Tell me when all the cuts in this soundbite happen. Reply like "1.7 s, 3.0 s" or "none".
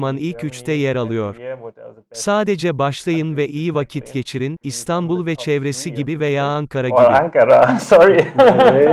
4.6 s

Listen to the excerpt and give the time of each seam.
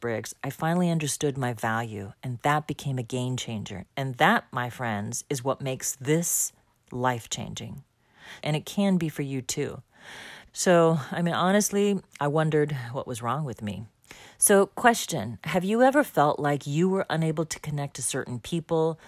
3.9 s, 8.4 s, 10.5 s

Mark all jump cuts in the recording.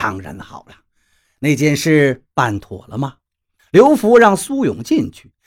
3.6 s

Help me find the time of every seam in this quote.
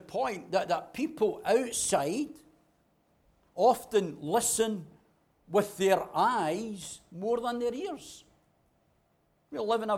none

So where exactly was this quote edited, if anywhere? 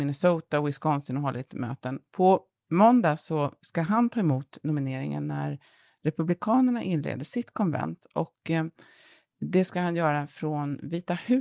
none

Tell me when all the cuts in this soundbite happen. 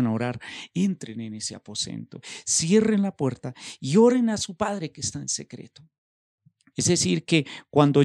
6.7 s

